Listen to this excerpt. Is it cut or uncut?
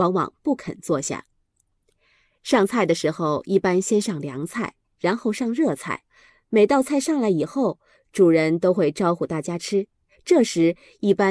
uncut